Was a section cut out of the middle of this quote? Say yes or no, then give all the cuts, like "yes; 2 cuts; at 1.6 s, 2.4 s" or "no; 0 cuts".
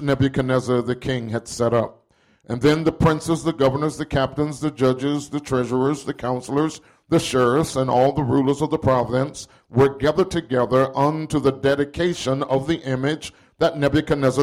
no; 0 cuts